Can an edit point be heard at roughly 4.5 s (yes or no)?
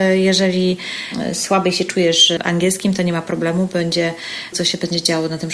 yes